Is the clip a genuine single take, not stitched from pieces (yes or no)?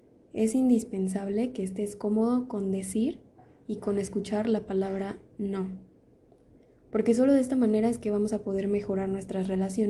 yes